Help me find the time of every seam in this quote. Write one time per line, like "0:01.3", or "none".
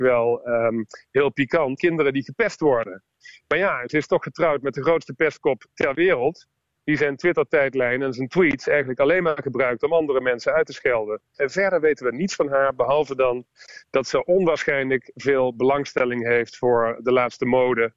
0:01.8
0:11.4